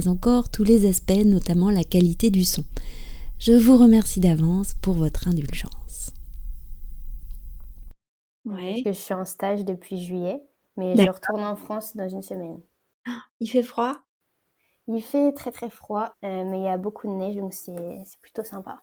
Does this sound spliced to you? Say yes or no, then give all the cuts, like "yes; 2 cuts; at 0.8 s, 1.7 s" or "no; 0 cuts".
yes; 2 cuts; at 8.3 s, 16.1 s